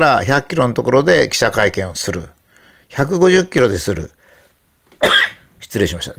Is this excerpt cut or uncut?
uncut